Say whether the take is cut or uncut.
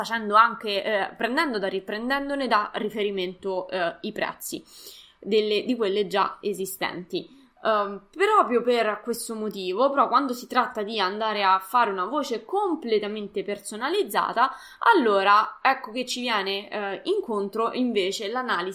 uncut